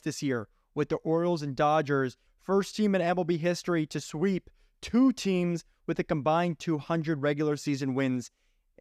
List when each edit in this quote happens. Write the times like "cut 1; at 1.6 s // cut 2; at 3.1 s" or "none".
cut 1; at 2.3 s